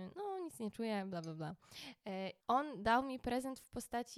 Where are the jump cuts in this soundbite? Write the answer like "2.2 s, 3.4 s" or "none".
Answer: 2.4 s